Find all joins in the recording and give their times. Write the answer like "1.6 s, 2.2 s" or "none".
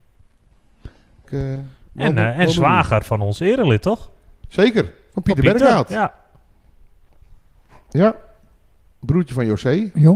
1.2 s